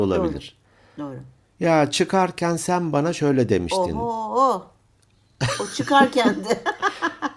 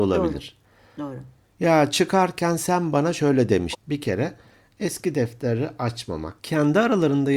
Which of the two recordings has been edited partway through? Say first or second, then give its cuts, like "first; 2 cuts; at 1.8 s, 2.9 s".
second; 2 cuts; at 3.7 s, 6.4 s